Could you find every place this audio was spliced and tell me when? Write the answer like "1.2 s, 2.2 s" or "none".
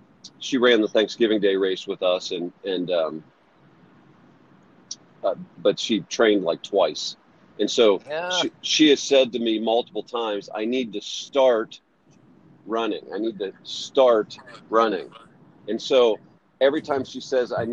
none